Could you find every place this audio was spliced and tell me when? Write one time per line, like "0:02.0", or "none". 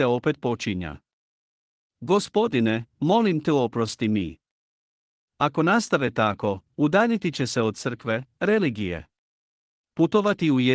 0:09.8